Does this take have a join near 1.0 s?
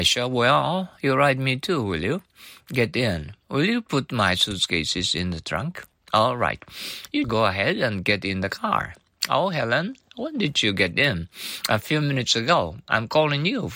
no; 1 cut; at 7.2 s

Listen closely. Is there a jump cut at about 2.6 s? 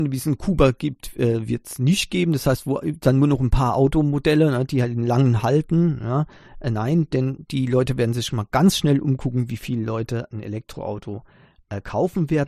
no; 0 cuts

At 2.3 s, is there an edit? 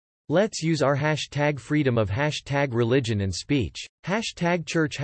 no; 1 cut; at 3.9 s

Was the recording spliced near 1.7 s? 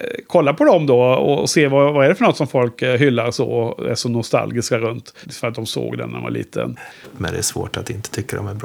no; 2 cuts; at 5.2 s, 7.0 s

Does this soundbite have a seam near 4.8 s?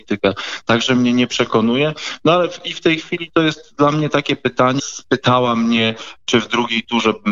yes; 1 cut; at 4.8 s

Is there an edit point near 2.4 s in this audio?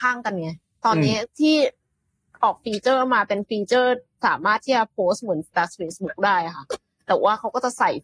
no; 1 cut; at 5.5 s

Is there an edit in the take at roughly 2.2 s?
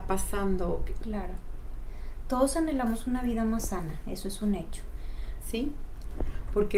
no; 2 cuts; at 1.0 s, 5.4 s

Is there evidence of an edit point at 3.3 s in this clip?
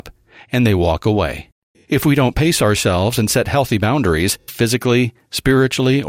no; 2 cuts; at 1.7 s, 4.5 s

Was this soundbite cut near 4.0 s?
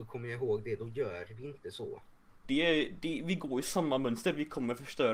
no; 1 cut; at 2.4 s

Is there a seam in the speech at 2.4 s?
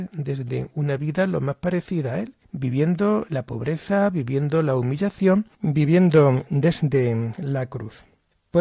no; 1 cut; at 5.5 s

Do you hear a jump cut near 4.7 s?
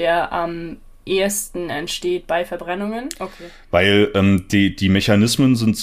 no; 1 cut; at 3.1 s

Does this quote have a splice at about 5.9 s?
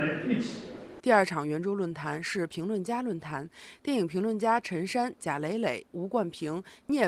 yes; 2 cuts; at 1.0 s, 5.9 s

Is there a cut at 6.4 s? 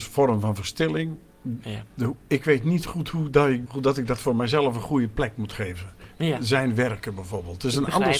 no; 1 cut; at 3.7 s

